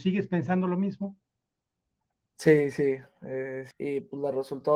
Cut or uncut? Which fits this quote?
cut